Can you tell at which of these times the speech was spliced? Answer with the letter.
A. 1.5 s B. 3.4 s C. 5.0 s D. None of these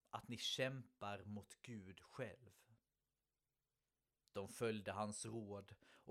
D